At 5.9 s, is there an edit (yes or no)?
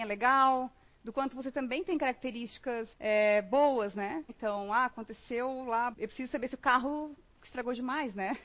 yes